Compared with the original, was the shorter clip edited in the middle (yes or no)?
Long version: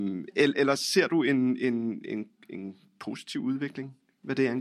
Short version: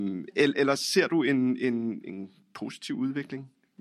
yes